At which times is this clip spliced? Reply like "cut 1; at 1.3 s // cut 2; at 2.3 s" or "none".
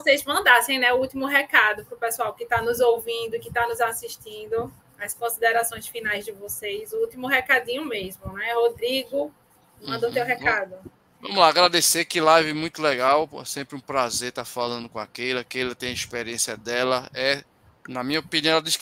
none